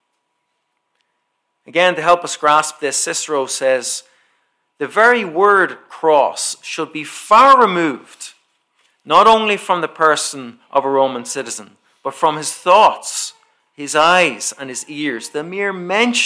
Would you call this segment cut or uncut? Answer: uncut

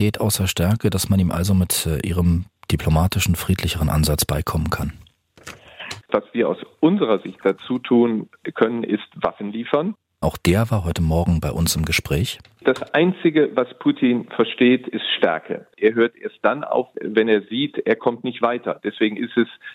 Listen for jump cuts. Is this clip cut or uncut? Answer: cut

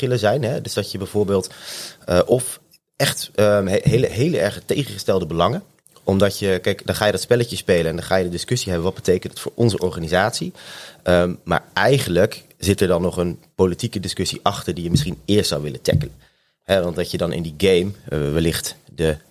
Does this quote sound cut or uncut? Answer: uncut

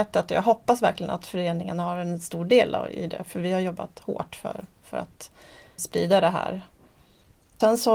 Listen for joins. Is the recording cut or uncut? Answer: uncut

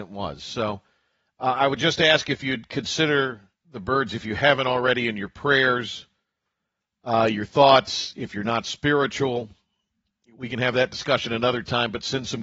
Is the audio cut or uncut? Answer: uncut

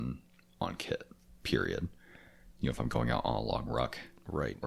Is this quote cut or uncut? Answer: cut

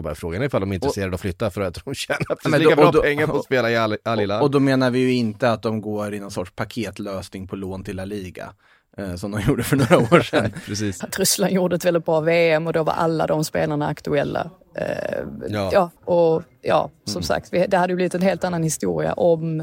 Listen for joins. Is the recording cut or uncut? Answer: cut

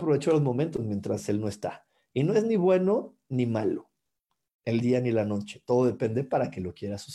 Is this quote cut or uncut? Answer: uncut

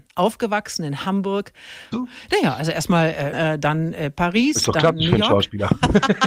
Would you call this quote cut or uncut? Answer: cut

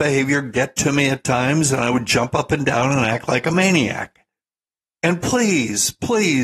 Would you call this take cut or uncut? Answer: cut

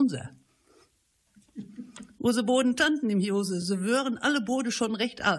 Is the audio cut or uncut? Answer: uncut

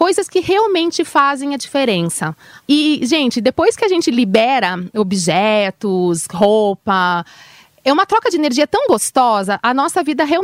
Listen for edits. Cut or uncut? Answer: cut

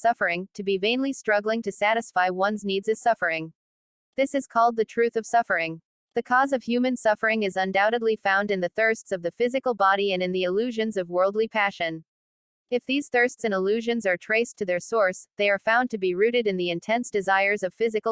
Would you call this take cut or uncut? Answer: cut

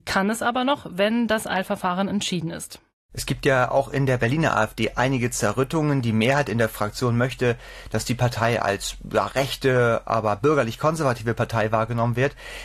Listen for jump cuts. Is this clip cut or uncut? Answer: uncut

